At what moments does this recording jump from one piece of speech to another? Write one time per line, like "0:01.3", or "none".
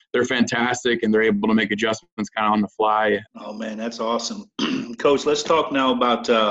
0:03.3